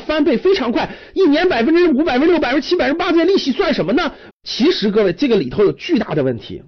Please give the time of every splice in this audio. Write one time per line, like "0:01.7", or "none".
0:04.3